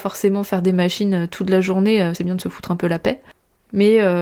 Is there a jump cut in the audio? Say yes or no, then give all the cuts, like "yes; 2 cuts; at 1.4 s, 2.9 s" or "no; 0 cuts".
yes; 1 cut; at 2.1 s